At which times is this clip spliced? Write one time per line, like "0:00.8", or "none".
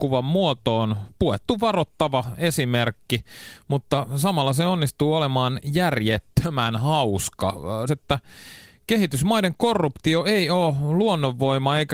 0:07.9